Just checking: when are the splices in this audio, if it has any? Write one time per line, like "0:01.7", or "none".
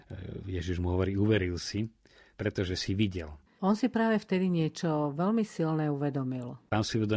0:03.5